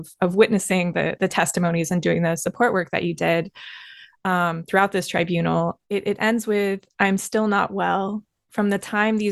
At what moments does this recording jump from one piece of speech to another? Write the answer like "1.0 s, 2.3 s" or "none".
5.8 s